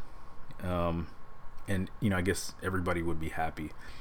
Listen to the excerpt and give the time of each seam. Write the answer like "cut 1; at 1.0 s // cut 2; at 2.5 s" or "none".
none